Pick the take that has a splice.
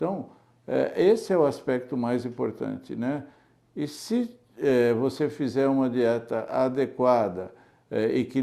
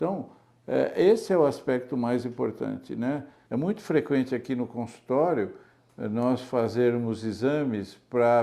second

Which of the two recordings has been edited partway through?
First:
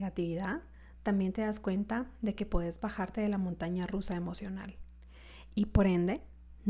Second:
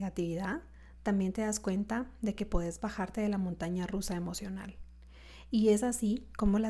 first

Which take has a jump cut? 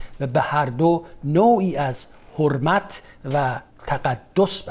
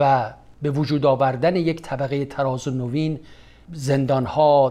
first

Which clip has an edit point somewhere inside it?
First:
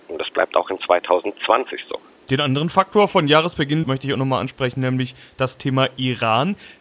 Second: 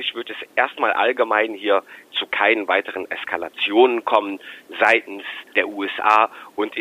first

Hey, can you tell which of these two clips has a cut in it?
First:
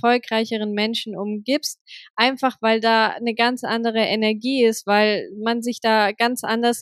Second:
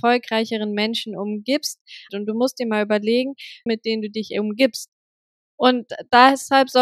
second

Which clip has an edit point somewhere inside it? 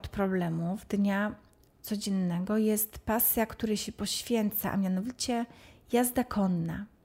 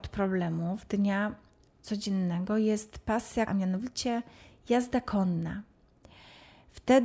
second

